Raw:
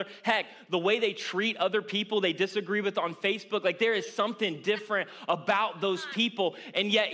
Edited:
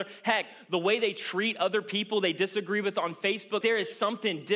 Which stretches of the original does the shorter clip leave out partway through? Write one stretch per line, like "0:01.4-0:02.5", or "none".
0:03.6-0:03.8